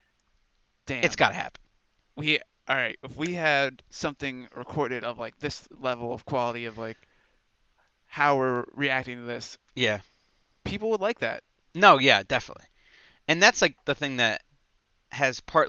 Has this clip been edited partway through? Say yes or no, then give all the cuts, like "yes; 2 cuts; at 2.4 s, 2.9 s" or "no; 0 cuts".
no; 0 cuts